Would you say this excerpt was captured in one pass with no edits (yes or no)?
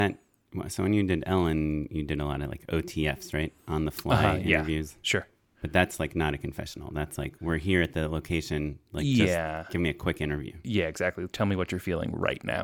yes